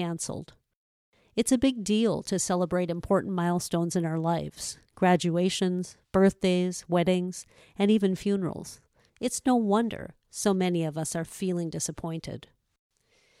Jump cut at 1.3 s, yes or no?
no